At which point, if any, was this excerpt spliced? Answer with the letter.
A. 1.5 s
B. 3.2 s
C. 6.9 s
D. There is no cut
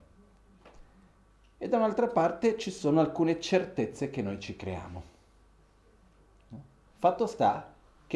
C